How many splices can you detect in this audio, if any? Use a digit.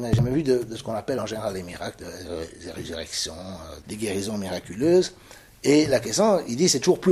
1